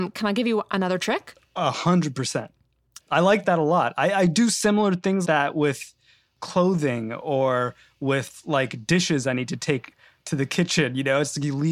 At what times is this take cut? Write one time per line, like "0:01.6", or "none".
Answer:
0:03.0
0:05.2